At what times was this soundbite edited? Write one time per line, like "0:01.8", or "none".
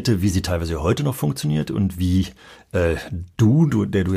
none